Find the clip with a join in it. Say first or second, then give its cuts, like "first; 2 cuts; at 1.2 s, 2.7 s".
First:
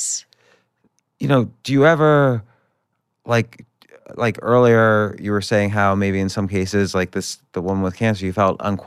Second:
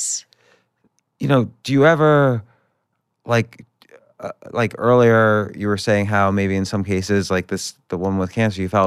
first; 1 cut; at 4.0 s